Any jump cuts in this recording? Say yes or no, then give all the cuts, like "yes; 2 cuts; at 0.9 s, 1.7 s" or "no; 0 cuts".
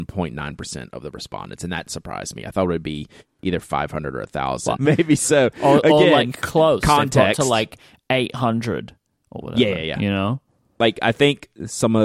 yes; 1 cut; at 4.8 s